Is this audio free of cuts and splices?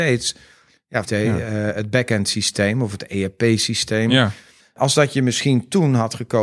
no; 2 cuts; at 1.0 s, 4.6 s

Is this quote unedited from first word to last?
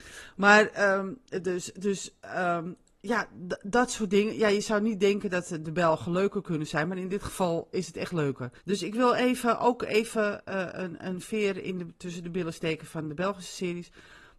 no; 1 cut; at 8.6 s

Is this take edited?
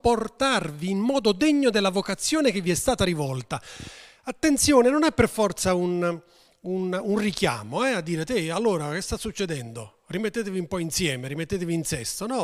no; 0 cuts

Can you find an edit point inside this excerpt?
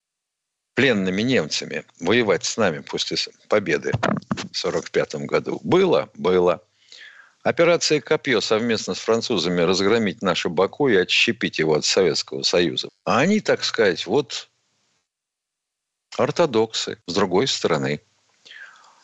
yes; 2 cuts; at 12.9 s, 17.0 s

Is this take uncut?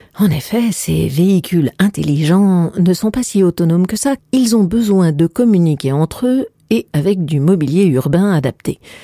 yes; 0 cuts

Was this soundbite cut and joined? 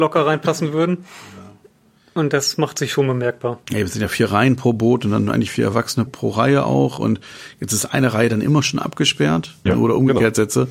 yes; 2 cuts; at 6.1 s, 9.7 s

